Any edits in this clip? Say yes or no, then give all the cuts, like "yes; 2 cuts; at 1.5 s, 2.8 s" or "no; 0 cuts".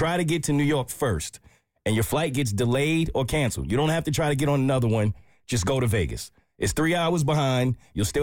no; 0 cuts